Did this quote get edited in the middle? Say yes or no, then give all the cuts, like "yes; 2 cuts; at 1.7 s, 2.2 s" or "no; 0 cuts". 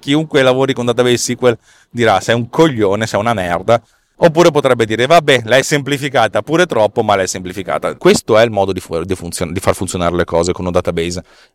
yes; 1 cut; at 8.0 s